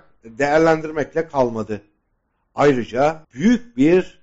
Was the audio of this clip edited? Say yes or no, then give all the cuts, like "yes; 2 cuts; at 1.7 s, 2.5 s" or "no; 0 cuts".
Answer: yes; 1 cut; at 3.2 s